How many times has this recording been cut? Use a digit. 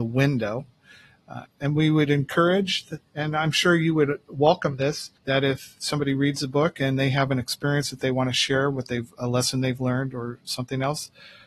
2